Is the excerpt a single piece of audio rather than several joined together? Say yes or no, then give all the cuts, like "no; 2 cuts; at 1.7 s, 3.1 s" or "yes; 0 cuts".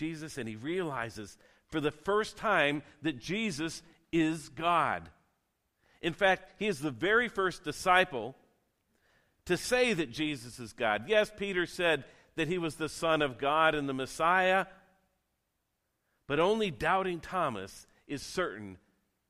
yes; 0 cuts